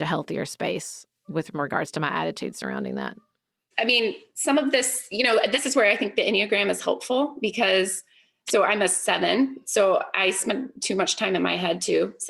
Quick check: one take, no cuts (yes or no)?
yes